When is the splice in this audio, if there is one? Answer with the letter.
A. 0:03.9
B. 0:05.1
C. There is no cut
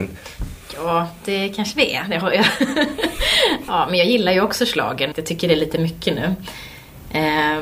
B